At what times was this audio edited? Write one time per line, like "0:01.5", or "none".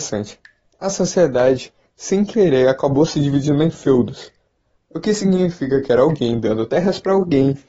none